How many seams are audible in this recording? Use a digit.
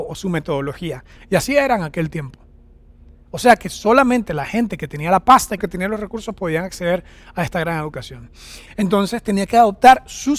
3